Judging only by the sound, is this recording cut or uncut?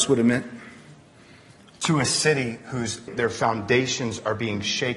cut